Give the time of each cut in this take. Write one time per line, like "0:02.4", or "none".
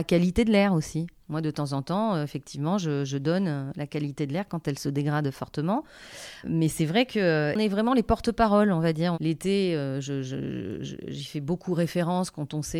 0:06.4
0:09.1